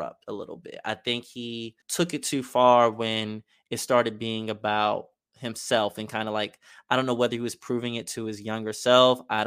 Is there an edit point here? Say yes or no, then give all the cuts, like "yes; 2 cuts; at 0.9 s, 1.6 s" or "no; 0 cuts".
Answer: yes; 1 cut; at 1.8 s